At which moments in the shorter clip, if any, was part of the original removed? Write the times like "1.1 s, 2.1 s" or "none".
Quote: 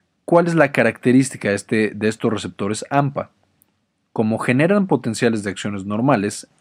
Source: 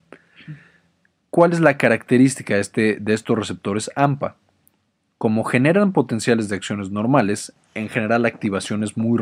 none

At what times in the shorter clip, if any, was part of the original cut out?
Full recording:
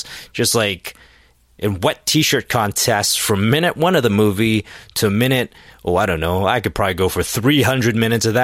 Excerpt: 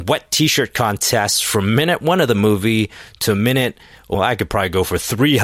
4.1 s

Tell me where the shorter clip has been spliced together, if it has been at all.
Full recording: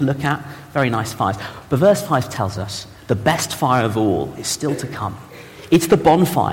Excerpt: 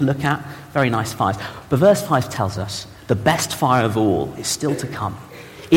none

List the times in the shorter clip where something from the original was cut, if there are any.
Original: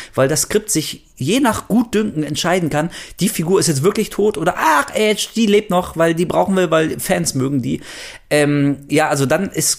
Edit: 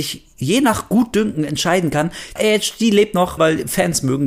2.4 s, 3.4 s

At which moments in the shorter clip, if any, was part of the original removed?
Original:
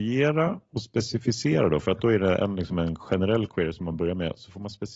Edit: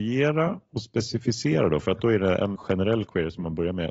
2.6 s

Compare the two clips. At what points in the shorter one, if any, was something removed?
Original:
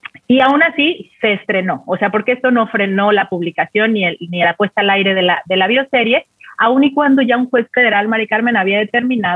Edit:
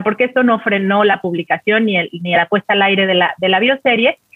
none

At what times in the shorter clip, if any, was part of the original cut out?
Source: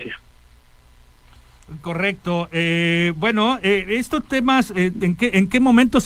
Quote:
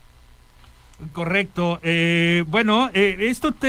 none

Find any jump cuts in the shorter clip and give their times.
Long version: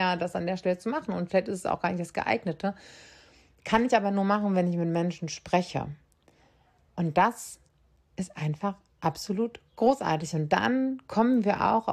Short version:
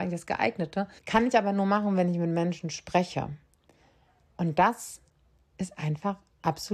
1.0 s

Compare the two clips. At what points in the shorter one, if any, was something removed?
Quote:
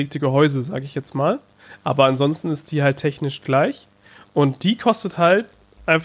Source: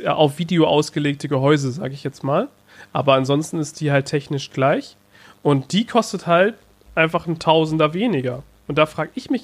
none

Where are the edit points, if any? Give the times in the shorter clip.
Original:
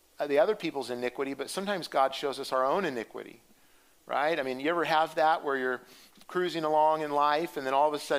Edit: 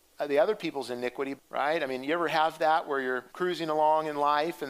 1.4 s, 3.3 s

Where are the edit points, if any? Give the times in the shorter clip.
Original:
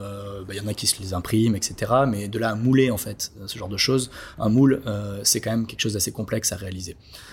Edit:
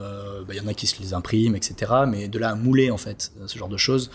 none

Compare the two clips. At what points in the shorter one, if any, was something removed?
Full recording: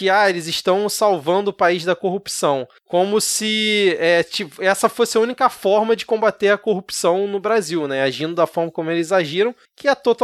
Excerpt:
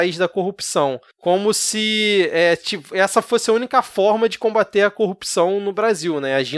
none

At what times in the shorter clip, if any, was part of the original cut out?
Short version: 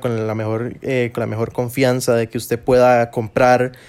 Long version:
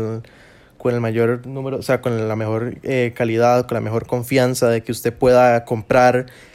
1.1 s

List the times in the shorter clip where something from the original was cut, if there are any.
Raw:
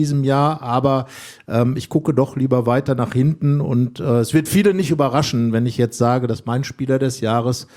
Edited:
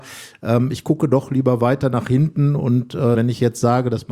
3.1 s

